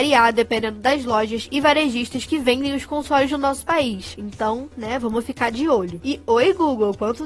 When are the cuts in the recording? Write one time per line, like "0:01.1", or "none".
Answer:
none